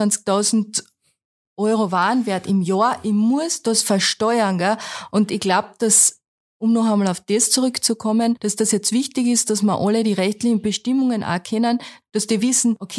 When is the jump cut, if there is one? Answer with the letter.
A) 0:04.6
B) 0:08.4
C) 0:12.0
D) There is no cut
C